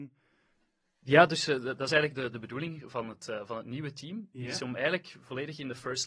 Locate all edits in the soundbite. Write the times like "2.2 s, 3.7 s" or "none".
none